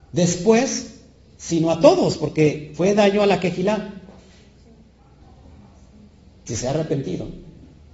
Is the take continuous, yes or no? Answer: no